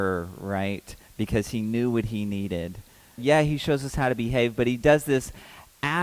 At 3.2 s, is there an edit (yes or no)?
yes